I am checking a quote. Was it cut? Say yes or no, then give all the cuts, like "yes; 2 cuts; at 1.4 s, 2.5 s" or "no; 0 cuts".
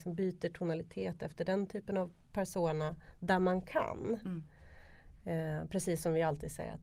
no; 0 cuts